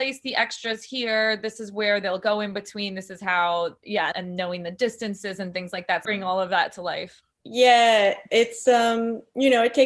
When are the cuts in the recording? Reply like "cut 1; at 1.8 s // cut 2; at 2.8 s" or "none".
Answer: cut 1; at 4.1 s // cut 2; at 6.0 s // cut 3; at 7.4 s